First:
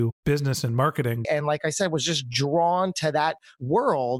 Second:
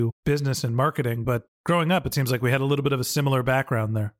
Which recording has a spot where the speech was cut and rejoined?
first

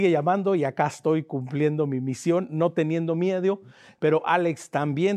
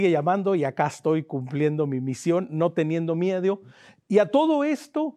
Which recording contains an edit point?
first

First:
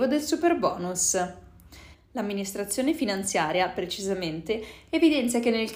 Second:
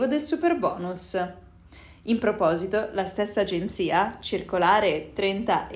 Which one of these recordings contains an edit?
first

